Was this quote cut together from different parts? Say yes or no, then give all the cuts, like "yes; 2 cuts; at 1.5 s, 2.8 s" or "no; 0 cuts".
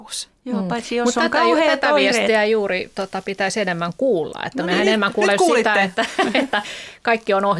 no; 0 cuts